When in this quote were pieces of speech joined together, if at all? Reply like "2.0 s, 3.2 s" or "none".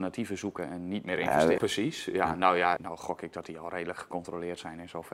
1.6 s, 2.8 s